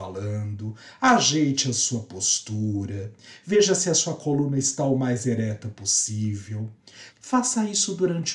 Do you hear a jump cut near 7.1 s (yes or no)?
yes